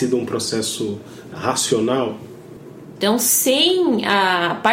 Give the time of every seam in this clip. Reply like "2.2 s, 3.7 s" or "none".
3.0 s